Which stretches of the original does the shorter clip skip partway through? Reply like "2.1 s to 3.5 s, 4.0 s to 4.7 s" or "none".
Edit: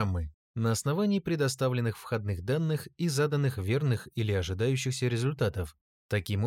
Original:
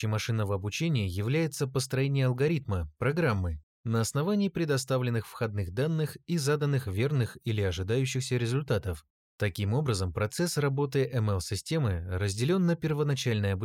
none